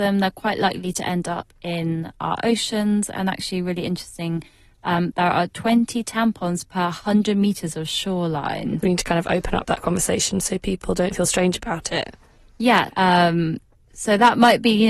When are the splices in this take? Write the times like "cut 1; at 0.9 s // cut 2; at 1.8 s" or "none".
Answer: cut 1; at 8.8 s // cut 2; at 12.9 s